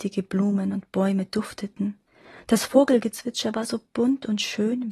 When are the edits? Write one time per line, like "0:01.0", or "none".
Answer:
none